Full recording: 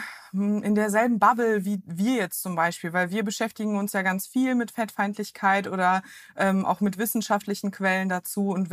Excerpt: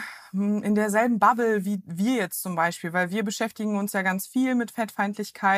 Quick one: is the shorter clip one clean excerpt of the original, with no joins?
yes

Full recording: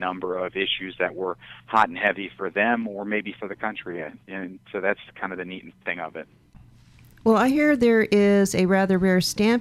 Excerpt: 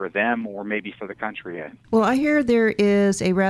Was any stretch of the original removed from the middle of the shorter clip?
yes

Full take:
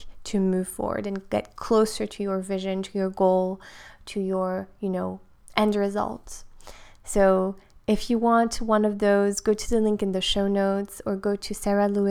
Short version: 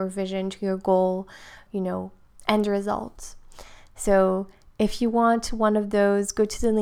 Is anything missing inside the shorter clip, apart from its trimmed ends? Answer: yes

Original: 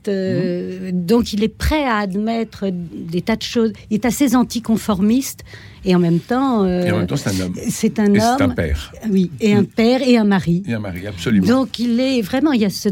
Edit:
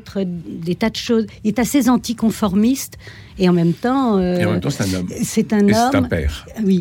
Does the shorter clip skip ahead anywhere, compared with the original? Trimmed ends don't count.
no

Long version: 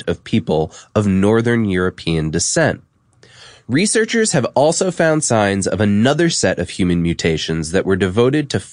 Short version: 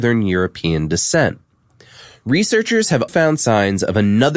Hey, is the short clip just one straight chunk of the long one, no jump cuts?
no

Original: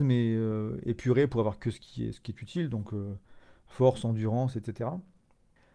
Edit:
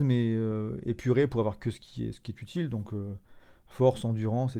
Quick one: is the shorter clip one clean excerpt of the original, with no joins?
yes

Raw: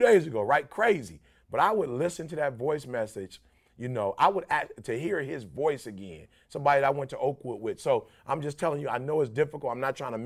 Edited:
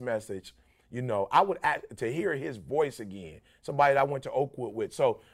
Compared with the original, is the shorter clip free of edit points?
yes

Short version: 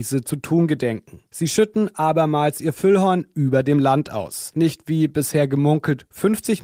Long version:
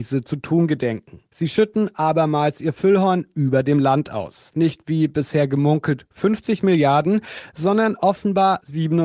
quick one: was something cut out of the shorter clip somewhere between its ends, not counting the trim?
no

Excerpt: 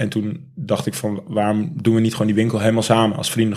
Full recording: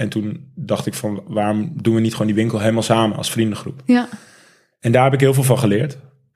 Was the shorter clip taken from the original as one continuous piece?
yes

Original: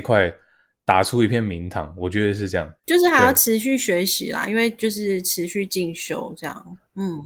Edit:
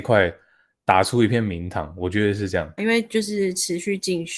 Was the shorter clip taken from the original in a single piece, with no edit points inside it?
no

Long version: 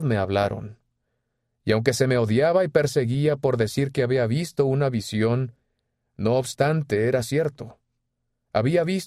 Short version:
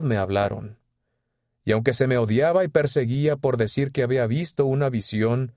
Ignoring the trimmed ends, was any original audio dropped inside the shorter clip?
no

